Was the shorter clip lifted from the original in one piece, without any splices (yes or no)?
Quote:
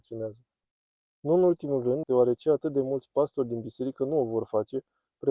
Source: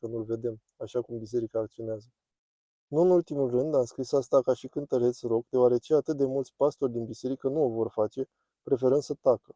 no